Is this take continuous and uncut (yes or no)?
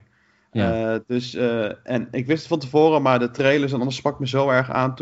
yes